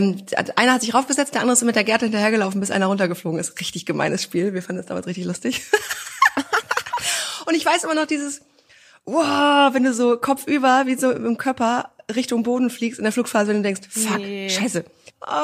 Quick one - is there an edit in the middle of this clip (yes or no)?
no